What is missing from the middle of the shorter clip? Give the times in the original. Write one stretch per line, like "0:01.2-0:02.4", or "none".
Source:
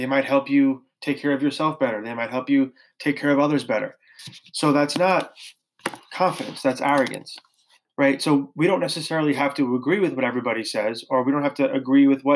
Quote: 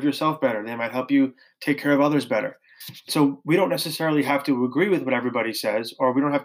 0:04.5-0:08.2